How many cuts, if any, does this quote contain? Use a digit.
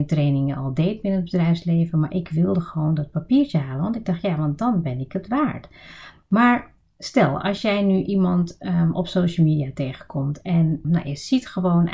1